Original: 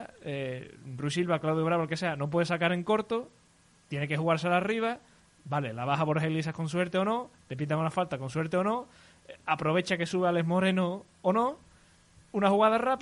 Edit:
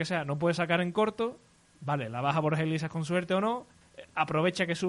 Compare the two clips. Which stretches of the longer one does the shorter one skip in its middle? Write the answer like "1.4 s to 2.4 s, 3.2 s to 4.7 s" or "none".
3.6 s to 5.3 s, 7.4 s to 9.1 s